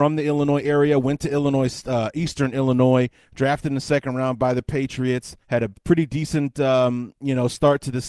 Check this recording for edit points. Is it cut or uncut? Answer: cut